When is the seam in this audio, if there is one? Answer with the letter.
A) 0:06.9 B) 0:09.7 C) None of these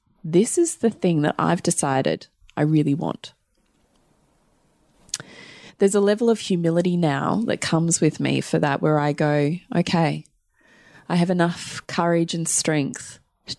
C